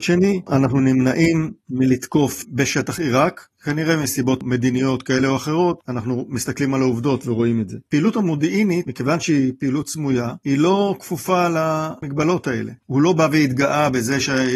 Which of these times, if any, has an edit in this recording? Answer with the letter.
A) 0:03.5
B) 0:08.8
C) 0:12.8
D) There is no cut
C